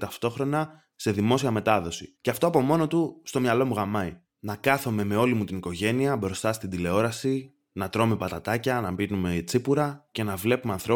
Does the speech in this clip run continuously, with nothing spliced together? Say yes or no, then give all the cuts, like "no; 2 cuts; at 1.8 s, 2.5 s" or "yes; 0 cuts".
no; 1 cut; at 2.1 s